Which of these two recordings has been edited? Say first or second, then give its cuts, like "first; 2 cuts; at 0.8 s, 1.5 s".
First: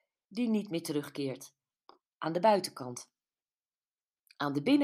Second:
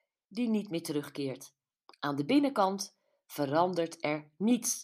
second; 1 cut; at 1.9 s